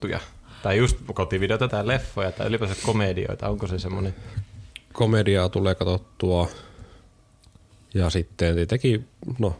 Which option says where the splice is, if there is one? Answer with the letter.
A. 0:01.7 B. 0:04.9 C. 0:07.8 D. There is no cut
A